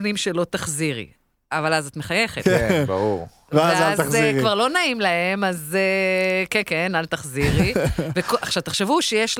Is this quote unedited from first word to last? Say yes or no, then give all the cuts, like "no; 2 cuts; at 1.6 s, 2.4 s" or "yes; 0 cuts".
yes; 0 cuts